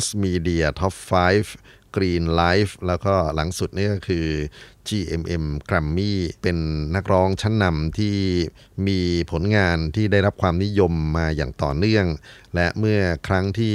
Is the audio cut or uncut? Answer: cut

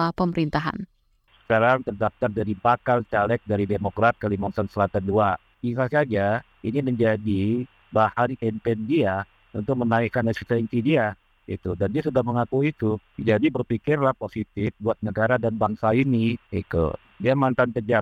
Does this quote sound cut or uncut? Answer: uncut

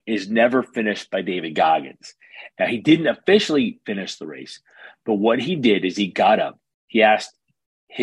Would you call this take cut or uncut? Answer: cut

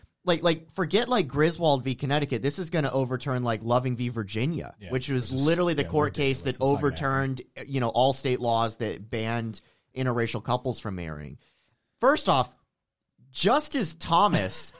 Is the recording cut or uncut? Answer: uncut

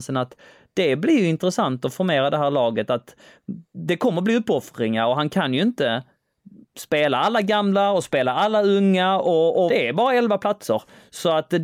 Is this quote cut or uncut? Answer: cut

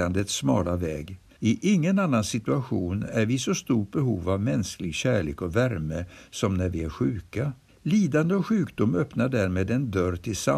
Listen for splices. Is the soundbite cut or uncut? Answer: cut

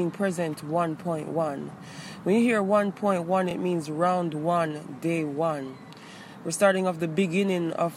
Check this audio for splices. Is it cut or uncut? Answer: uncut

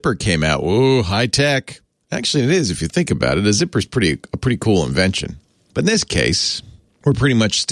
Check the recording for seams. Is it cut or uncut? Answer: uncut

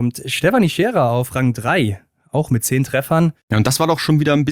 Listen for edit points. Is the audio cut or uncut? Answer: uncut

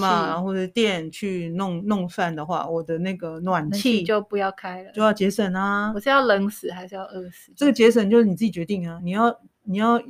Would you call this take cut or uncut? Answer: uncut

